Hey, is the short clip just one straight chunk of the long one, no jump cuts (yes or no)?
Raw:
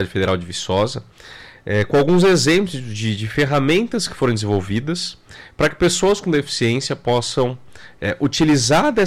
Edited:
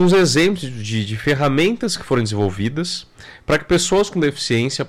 yes